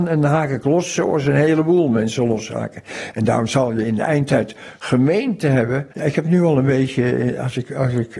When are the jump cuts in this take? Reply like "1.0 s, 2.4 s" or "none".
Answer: 5.9 s